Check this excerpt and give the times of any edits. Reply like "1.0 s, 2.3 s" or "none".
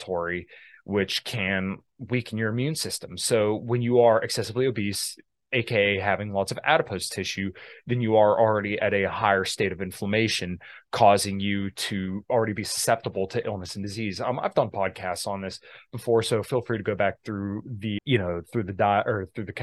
18.0 s